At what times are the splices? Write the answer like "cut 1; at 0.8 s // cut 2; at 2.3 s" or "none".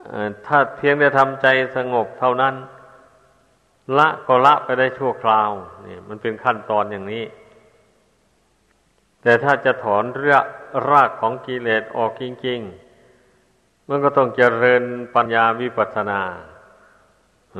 cut 1; at 15.3 s